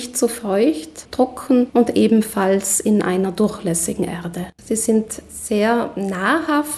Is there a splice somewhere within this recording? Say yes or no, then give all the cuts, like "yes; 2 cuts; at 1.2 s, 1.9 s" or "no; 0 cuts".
yes; 2 cuts; at 1.1 s, 4.6 s